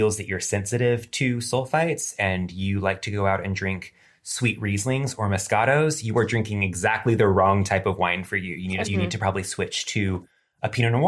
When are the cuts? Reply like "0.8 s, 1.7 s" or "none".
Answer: 8.8 s